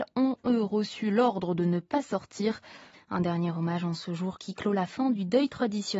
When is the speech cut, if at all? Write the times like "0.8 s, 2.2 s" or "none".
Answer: 2.9 s